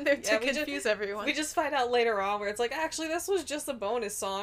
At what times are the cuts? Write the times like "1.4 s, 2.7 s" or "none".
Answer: none